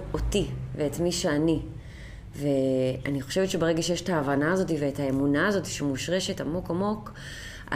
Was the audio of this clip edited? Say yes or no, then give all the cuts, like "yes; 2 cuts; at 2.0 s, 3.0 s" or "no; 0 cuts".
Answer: no; 0 cuts